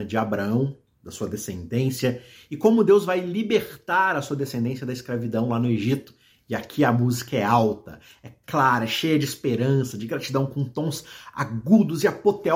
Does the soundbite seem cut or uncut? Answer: cut